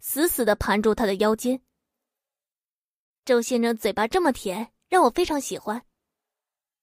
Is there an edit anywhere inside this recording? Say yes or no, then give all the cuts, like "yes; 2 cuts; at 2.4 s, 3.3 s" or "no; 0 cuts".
no; 0 cuts